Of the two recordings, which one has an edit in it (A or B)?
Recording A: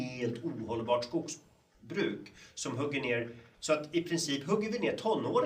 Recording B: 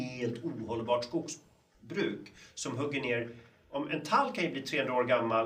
A